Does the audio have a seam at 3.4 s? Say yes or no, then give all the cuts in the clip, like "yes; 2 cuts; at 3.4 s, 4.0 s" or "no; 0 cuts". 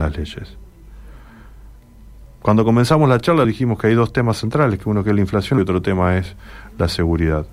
yes; 2 cuts; at 3.4 s, 5.6 s